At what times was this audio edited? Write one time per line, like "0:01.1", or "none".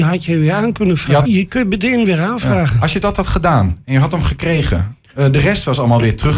0:01.2